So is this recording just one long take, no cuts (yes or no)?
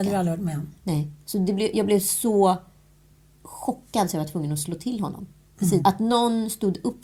no